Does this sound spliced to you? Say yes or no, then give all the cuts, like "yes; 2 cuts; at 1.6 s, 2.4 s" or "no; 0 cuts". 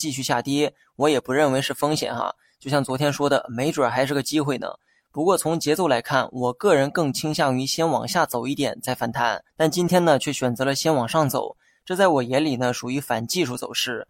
yes; 1 cut; at 9.5 s